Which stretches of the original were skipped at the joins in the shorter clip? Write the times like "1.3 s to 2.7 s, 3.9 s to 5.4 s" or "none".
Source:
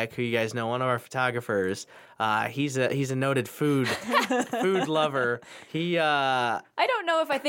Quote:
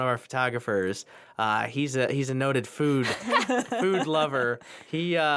none